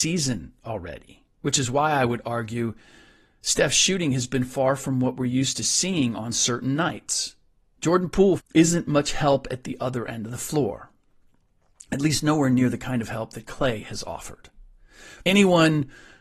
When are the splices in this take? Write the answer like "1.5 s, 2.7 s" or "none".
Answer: 8.4 s, 15.2 s